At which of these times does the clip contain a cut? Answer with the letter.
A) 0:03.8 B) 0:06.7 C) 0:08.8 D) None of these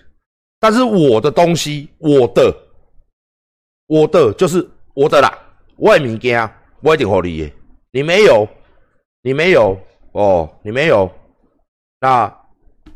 B